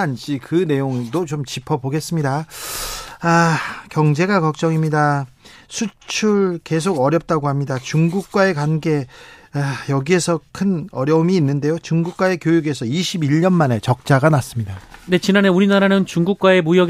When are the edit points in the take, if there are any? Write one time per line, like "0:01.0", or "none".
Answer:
none

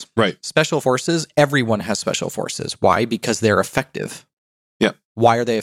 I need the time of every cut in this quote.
none

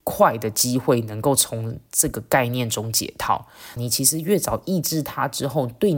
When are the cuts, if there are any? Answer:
0:03.8

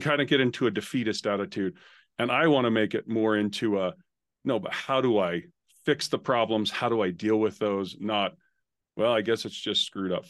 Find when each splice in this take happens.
none

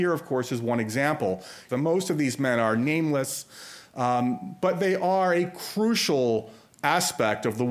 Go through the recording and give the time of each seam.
0:01.7

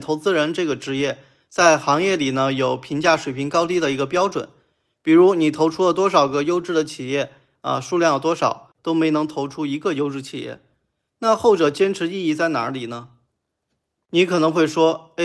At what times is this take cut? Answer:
0:08.8

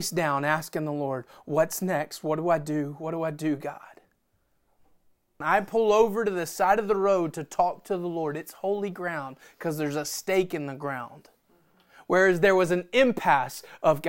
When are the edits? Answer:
0:05.4

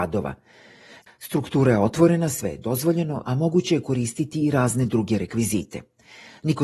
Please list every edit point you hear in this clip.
0:01.1
0:03.2

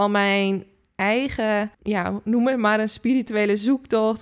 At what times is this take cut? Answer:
0:01.7

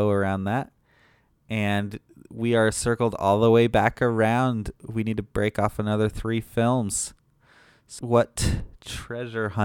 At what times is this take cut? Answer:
0:08.0

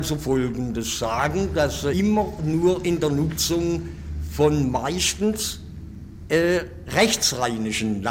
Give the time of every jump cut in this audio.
0:01.9

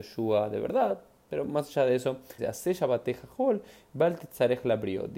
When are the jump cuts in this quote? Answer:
0:02.4

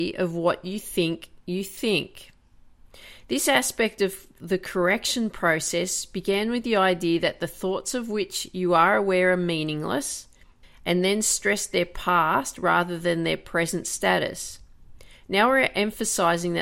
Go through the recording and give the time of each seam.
0:10.6

